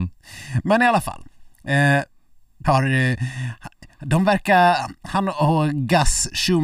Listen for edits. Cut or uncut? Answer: cut